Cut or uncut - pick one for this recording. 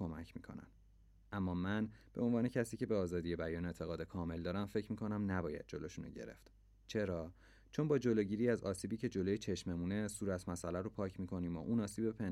uncut